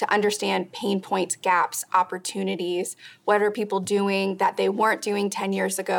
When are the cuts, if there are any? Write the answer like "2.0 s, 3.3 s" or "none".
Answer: none